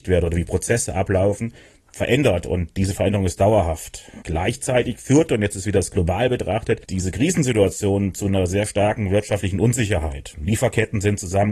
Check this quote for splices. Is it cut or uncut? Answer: uncut